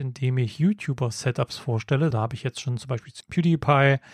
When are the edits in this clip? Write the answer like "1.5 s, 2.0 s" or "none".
2.1 s